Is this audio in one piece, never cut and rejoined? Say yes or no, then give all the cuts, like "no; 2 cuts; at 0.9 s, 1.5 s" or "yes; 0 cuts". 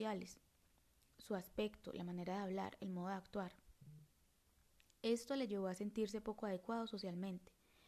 yes; 0 cuts